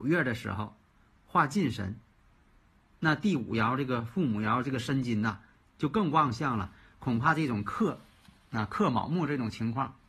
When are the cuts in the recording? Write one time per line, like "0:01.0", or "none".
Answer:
none